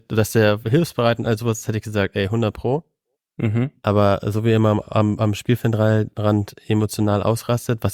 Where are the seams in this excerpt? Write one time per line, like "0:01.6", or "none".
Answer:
none